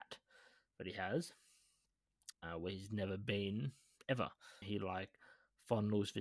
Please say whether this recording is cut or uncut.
cut